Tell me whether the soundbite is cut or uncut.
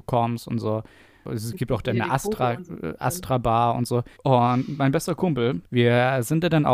cut